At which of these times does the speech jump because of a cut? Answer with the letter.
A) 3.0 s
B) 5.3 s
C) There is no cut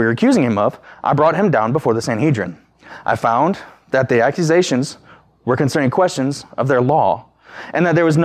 C